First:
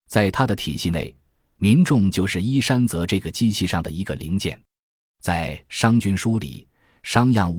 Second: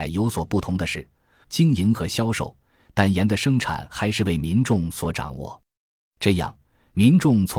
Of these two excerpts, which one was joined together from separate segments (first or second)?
second